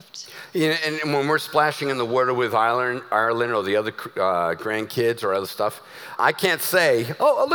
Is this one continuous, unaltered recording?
no; 1 cut; at 6.2 s

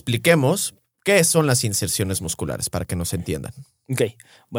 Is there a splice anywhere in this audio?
no; 0 cuts

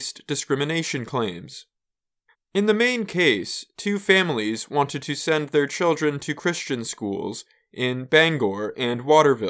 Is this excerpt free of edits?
no; 1 cut; at 2.3 s

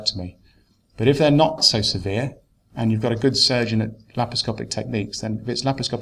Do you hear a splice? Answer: yes; 1 cut; at 1.6 s

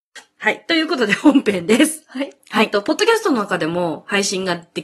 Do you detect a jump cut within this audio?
yes; 1 cut; at 2.4 s

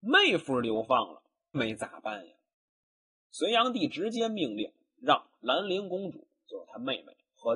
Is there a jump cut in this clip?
yes; 1 cut; at 1.5 s

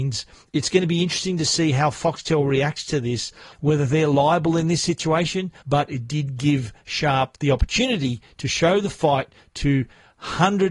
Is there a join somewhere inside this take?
yes; 2 cuts; at 3.5 s, 5.6 s

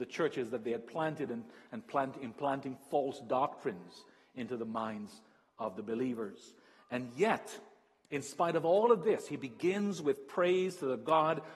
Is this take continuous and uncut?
yes; 0 cuts

